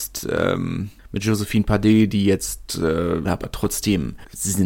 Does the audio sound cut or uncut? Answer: cut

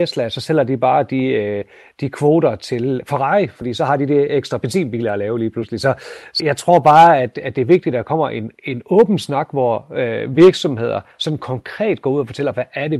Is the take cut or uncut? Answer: cut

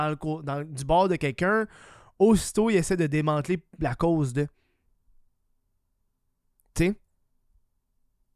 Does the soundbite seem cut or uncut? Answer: uncut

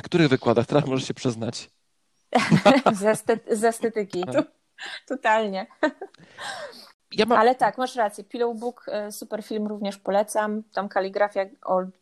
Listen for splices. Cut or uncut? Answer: cut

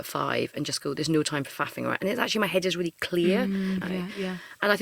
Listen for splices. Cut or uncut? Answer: cut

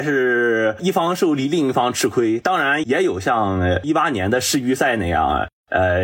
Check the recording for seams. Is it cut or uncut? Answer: uncut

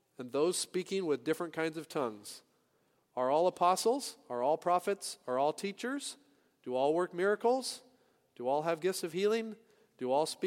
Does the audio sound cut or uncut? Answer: uncut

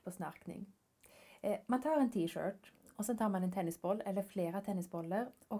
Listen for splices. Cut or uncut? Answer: uncut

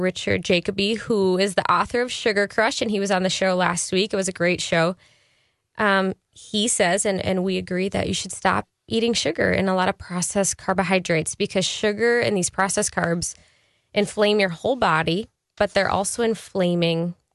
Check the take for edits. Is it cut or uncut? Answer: uncut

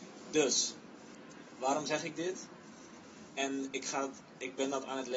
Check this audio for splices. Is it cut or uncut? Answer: cut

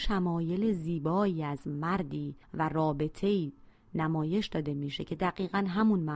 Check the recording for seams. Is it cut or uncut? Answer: cut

